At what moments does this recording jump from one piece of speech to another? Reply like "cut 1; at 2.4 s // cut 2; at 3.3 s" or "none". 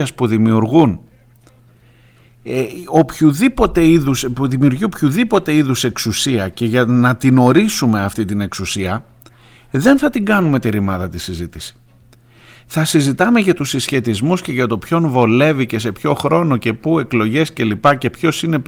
none